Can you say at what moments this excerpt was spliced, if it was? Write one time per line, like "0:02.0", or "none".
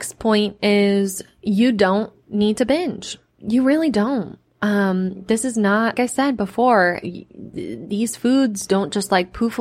0:05.9
0:07.0